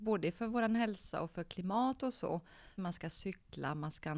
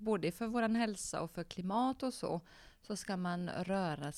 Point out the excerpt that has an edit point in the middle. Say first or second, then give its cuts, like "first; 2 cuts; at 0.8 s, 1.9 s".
first; 1 cut; at 2.8 s